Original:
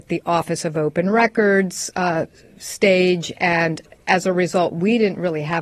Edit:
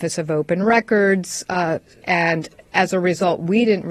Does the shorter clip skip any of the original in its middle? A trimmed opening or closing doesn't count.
yes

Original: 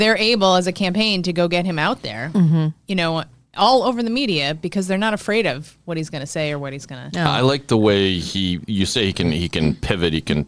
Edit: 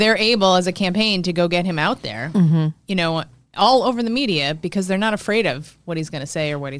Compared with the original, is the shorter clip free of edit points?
yes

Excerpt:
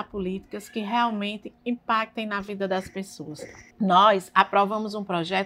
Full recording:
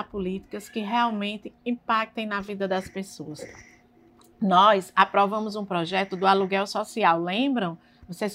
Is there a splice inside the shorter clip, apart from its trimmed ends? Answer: yes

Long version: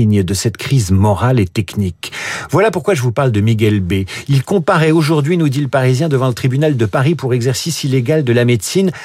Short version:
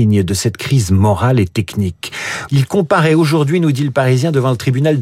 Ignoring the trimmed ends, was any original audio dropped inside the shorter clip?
yes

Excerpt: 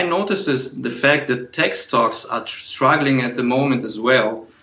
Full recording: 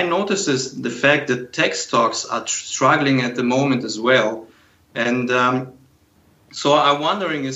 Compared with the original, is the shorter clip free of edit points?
yes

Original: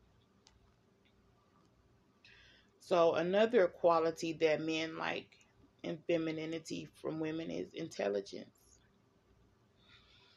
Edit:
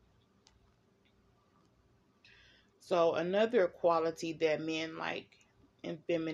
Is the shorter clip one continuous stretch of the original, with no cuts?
yes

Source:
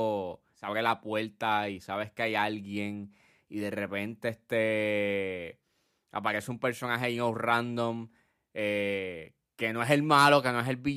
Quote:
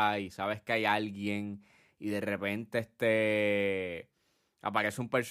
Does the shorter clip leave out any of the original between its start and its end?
no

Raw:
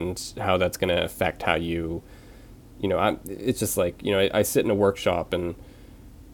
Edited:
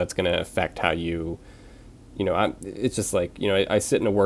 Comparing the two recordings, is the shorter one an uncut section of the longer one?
yes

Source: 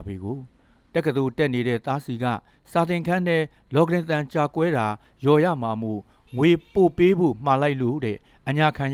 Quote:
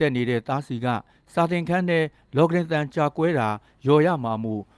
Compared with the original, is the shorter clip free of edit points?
yes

